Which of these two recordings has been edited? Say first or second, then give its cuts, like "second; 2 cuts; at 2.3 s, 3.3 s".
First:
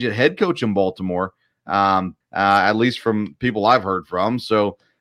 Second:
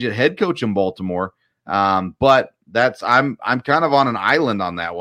first; 1 cut; at 2.2 s